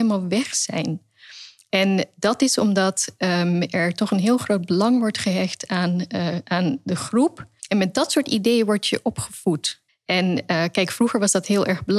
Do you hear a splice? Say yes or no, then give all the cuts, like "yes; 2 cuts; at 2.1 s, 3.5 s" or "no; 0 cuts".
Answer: yes; 2 cuts; at 7.6 s, 9.9 s